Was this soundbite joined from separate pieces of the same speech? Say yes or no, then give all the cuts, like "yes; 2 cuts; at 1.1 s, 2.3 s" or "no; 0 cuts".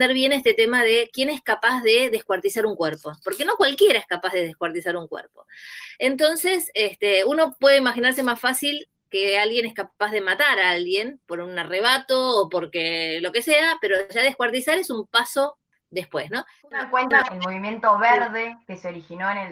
yes; 1 cut; at 17.2 s